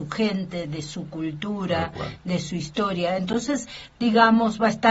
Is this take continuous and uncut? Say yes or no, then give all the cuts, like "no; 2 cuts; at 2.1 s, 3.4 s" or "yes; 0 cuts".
yes; 0 cuts